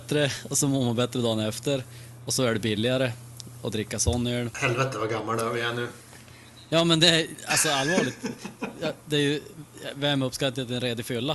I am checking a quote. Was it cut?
no; 0 cuts

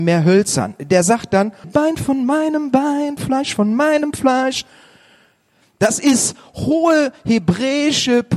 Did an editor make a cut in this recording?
yes; 1 cut; at 1.6 s

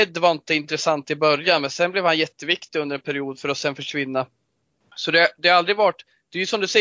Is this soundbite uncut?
yes; 0 cuts

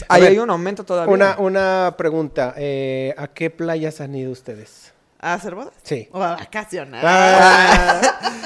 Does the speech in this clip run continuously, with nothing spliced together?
yes; 0 cuts

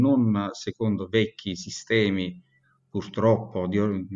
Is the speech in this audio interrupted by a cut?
no; 0 cuts

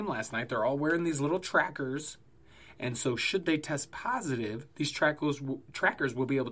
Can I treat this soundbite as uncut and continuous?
yes; 0 cuts

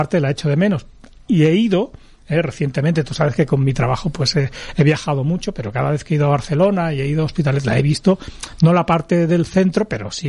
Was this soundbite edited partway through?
no; 0 cuts

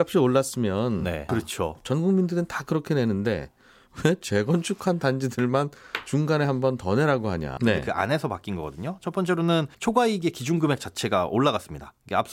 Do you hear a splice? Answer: yes; 3 cuts; at 1.3 s, 7.6 s, 9.7 s

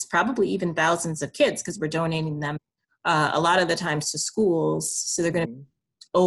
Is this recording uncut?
yes; 0 cuts

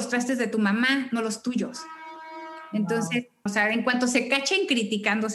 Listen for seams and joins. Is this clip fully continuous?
no; 1 cut; at 3.5 s

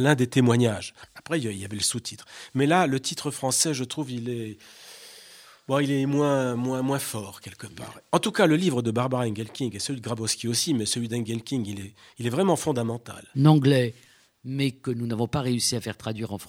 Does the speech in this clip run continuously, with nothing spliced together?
no; 1 cut; at 13.3 s

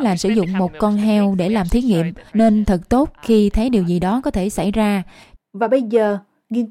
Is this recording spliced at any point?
yes; 2 cuts; at 2.3 s, 5.4 s

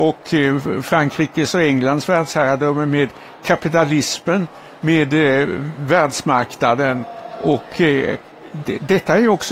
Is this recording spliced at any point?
no; 0 cuts

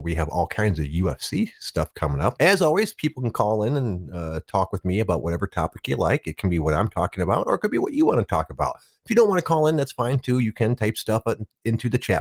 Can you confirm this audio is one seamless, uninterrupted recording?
no; 1 cut; at 2.4 s

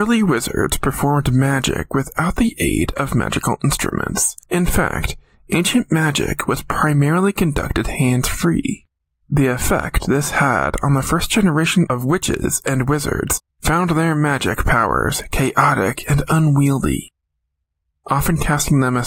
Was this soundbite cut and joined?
no; 0 cuts

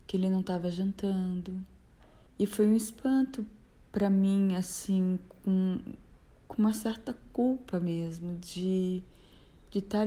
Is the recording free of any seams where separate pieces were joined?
no; 1 cut; at 2.3 s

